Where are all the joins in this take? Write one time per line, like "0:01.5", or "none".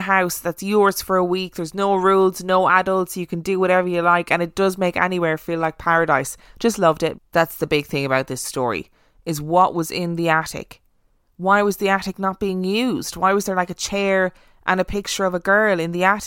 0:07.1